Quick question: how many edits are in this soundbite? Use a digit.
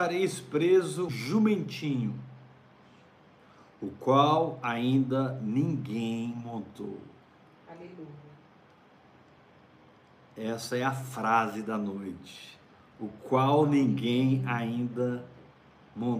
1